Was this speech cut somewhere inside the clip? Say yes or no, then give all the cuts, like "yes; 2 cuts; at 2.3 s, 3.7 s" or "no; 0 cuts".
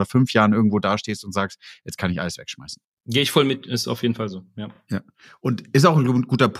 no; 0 cuts